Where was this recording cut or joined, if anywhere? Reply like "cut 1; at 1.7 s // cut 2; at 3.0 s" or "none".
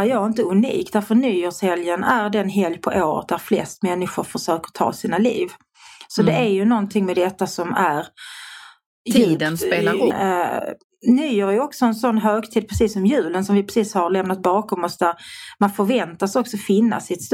cut 1; at 10.1 s

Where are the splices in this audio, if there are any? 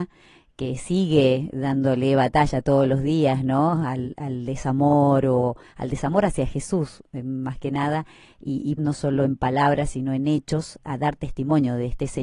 cut 1; at 8.8 s // cut 2; at 10.8 s

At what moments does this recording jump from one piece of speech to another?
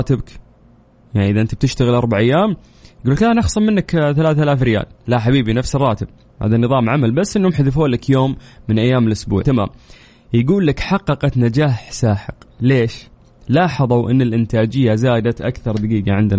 cut 1; at 9.4 s

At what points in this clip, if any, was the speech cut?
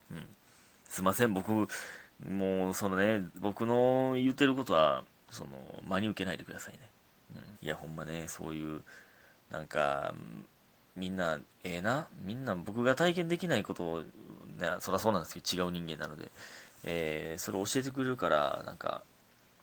cut 1; at 7.5 s

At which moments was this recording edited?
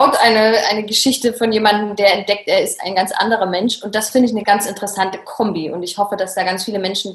none

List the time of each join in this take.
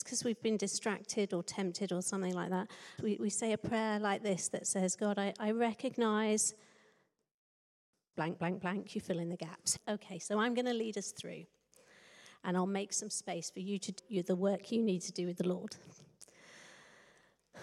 cut 1; at 3.0 s // cut 2; at 9.8 s // cut 3; at 14.0 s

